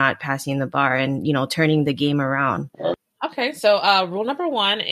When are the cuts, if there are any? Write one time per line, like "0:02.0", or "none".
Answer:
none